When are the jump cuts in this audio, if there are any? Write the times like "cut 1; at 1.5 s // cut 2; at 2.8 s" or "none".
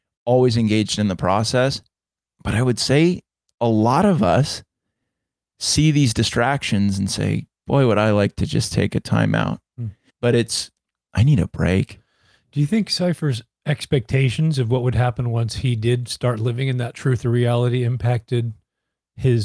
cut 1; at 10.1 s